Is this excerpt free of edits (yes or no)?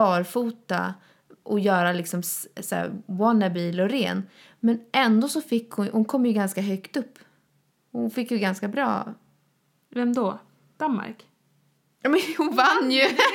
yes